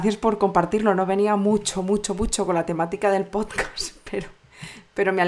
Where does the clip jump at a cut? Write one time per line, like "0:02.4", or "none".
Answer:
none